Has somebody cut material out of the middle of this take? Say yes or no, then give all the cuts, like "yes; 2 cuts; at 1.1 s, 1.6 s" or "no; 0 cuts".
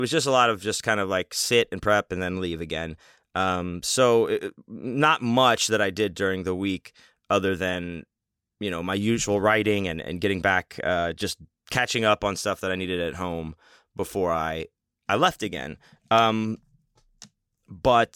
no; 0 cuts